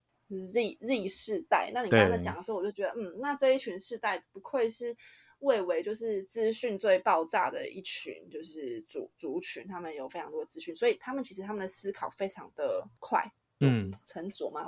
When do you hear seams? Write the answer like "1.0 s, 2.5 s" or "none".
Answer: 13.6 s